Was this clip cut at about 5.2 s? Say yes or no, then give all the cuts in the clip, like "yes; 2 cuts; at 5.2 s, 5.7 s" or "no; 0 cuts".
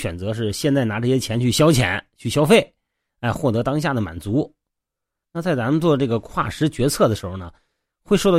yes; 1 cut; at 5.2 s